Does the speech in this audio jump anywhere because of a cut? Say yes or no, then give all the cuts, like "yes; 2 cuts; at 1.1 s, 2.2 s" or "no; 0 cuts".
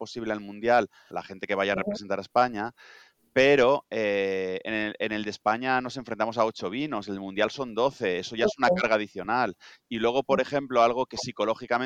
yes; 1 cut; at 1.1 s